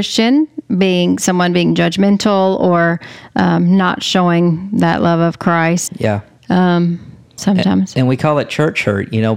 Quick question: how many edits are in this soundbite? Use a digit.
2